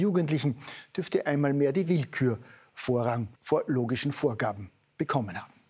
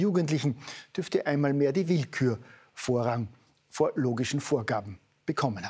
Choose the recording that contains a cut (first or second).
first